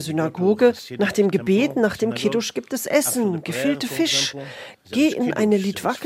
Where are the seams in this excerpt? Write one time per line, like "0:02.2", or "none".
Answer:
none